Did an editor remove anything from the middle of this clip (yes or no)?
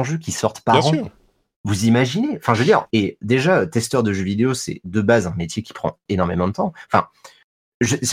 yes